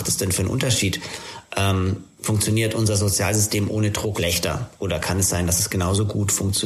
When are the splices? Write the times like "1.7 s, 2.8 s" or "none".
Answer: 4.1 s